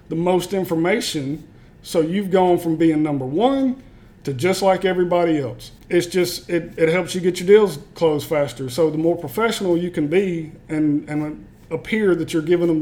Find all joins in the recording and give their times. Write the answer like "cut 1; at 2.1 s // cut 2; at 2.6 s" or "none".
cut 1; at 1.7 s // cut 2; at 5.8 s